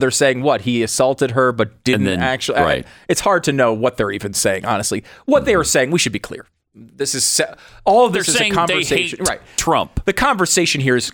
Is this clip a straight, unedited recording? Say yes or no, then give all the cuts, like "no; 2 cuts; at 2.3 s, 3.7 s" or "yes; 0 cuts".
yes; 0 cuts